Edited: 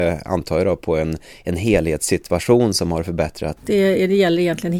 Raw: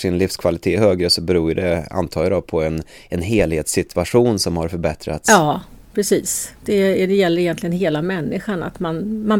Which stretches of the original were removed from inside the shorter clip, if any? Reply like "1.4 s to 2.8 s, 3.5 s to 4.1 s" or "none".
5.2 s to 6.6 s